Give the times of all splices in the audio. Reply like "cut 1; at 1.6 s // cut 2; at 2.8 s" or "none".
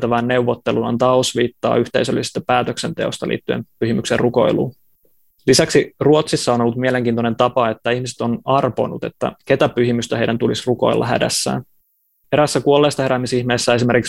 none